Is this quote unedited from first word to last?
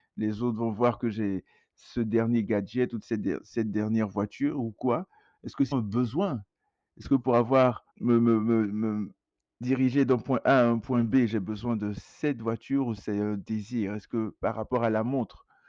no; 2 cuts; at 5.7 s, 7.9 s

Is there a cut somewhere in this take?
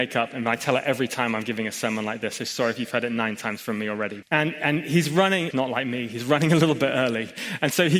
yes; 2 cuts; at 4.2 s, 5.5 s

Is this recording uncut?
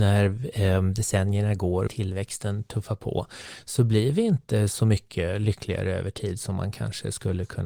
no; 1 cut; at 1.9 s

